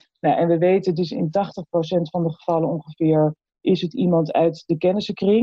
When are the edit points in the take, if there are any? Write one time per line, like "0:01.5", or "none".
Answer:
none